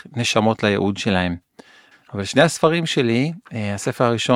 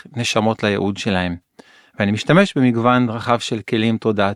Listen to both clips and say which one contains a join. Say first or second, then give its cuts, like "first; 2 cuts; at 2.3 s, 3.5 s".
first; 1 cut; at 1.9 s